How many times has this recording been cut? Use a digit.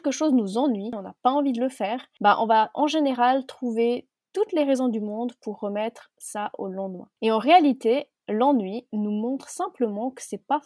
1